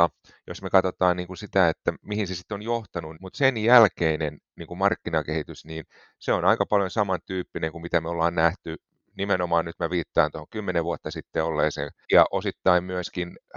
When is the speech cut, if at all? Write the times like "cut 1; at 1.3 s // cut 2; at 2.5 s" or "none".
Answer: cut 1; at 3.2 s // cut 2; at 12.0 s